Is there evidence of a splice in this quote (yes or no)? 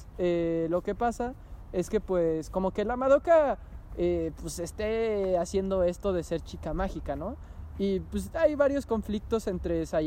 yes